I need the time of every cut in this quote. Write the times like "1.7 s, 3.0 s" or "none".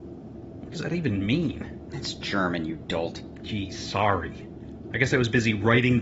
none